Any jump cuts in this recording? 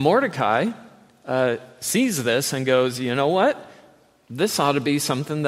no; 0 cuts

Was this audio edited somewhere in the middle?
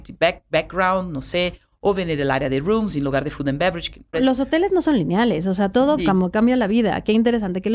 yes; 2 cuts; at 4.1 s, 6.0 s

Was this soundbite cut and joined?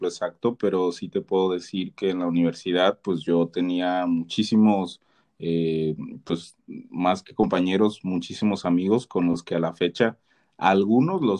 no; 0 cuts

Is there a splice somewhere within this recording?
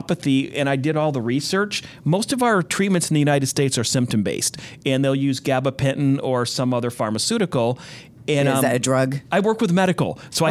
yes; 1 cut; at 9.3 s

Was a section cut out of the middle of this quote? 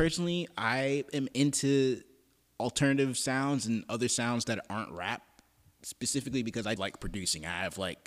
yes; 1 cut; at 6.8 s

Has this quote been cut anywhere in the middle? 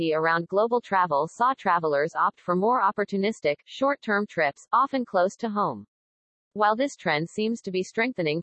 no; 0 cuts

